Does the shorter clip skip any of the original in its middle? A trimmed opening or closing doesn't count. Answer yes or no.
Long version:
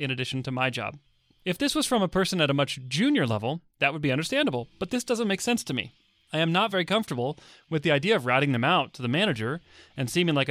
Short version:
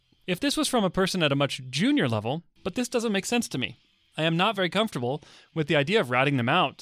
yes